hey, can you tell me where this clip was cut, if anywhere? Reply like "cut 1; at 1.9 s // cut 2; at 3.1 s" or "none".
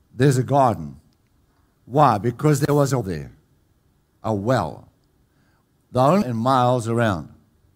cut 1; at 3.0 s // cut 2; at 6.2 s